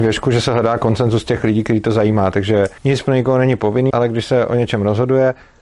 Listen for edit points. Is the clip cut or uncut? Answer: cut